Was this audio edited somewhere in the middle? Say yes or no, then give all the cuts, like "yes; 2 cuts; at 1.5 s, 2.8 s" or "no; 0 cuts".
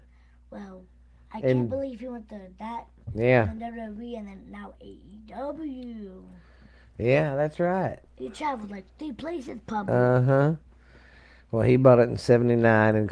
no; 0 cuts